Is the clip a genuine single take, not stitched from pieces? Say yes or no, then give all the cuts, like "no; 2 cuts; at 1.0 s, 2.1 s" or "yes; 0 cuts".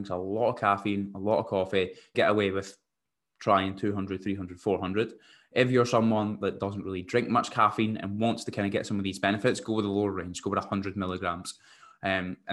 no; 1 cut; at 2.1 s